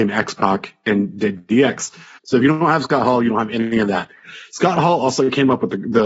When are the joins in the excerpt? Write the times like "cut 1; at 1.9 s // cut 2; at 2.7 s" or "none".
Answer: cut 1; at 2.2 s